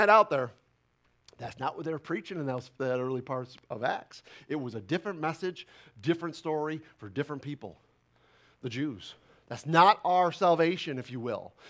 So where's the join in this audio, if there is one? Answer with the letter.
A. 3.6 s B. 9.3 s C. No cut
A